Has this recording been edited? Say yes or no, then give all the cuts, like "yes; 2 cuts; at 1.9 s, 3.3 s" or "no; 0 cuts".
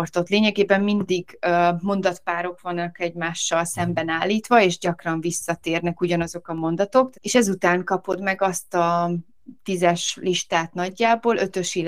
yes; 1 cut; at 7.1 s